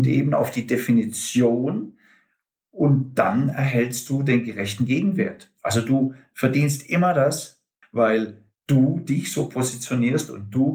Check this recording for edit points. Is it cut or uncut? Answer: cut